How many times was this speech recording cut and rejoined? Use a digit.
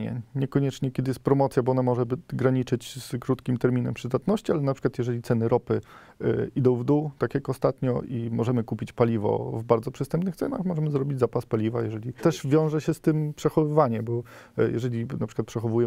1